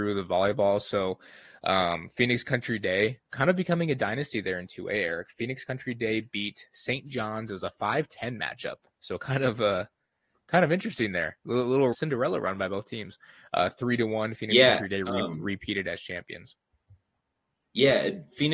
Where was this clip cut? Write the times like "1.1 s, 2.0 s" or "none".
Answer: 11.9 s